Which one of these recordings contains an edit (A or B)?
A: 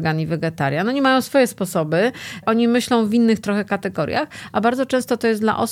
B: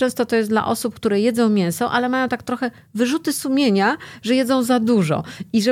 A